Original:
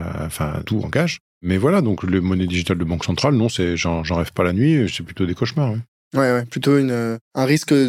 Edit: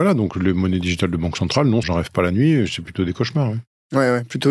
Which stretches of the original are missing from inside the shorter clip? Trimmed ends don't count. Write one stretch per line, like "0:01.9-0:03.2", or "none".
0:03.5-0:04.0